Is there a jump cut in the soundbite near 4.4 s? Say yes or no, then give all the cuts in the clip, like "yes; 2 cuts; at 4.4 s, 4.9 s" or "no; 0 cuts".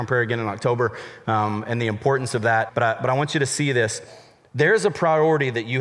no; 1 cut; at 2.7 s